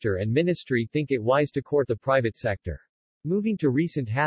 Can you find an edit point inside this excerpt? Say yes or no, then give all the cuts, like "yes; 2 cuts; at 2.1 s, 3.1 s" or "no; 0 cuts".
yes; 1 cut; at 3.1 s